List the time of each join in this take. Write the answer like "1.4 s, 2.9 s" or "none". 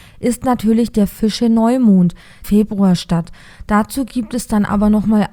2.4 s